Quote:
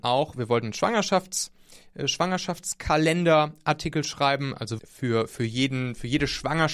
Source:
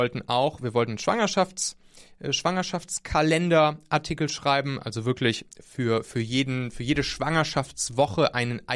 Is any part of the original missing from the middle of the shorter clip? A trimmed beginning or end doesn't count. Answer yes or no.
yes